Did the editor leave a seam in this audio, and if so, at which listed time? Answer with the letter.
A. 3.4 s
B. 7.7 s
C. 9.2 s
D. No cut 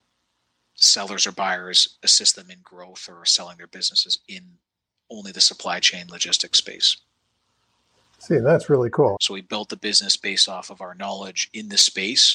C